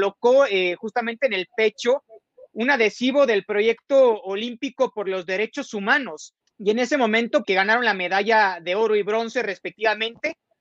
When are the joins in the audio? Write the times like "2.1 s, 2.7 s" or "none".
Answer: 6.4 s, 7.4 s